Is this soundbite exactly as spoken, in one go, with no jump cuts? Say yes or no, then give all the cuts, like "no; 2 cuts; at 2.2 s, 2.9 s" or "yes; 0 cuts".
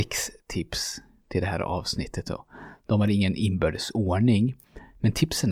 yes; 0 cuts